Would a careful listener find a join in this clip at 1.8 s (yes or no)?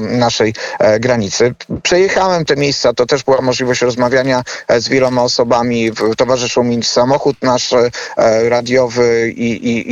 no